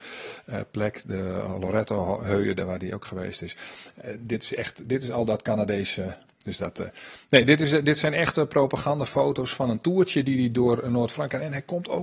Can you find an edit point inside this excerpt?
yes; 1 cut; at 6.4 s

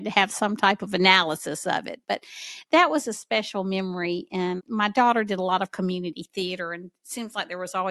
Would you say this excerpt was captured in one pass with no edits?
no; 1 cut; at 4.6 s

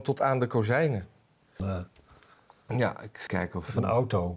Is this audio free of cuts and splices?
no; 2 cuts; at 1.6 s, 3.3 s

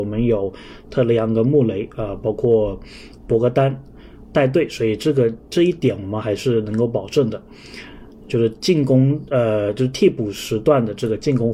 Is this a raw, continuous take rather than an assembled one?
yes; 0 cuts

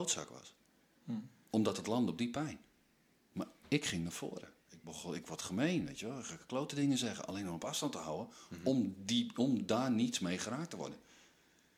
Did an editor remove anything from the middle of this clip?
no; 0 cuts

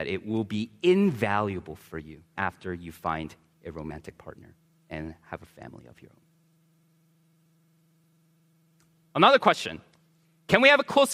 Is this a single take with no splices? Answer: no; 1 cut; at 2.4 s

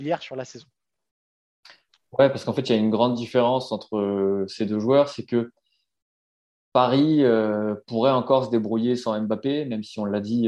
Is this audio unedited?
yes; 0 cuts

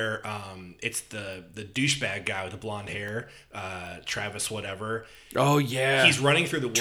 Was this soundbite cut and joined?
no; 0 cuts

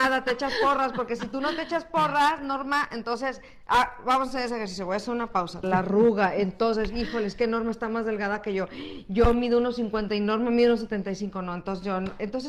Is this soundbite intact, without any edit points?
no; 1 cut; at 5.6 s

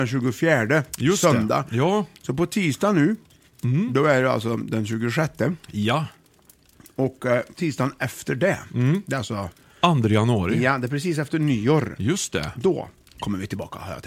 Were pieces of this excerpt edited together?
no; 0 cuts

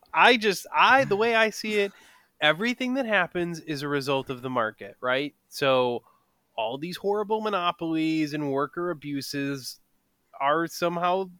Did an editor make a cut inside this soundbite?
no; 0 cuts

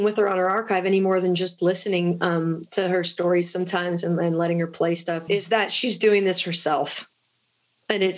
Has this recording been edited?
yes; 1 cut; at 5.3 s

